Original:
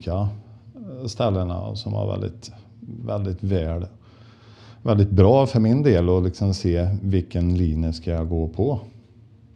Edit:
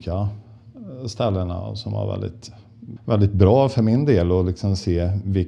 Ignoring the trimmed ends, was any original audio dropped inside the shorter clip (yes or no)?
yes